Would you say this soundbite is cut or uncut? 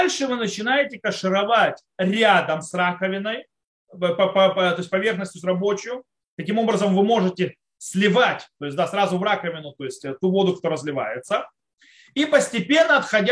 uncut